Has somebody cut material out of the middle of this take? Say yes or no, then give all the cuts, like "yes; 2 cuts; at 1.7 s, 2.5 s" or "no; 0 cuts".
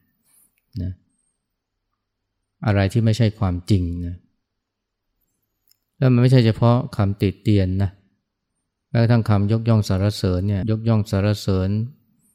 yes; 1 cut; at 10.6 s